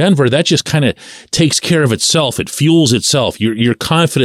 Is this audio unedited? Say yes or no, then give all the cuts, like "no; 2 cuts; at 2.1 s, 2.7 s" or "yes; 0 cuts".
yes; 0 cuts